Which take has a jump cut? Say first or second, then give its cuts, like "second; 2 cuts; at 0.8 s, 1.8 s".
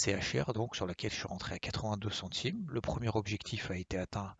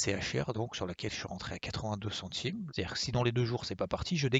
second; 1 cut; at 2.7 s